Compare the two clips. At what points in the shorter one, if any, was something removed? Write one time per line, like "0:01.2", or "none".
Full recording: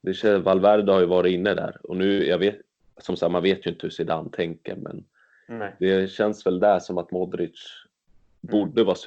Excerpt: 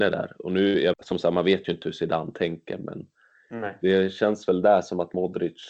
0:00.9